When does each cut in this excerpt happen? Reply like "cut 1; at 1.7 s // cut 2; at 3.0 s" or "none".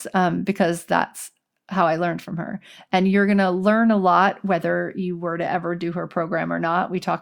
cut 1; at 2.9 s